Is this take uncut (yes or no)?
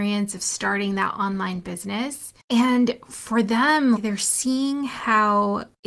no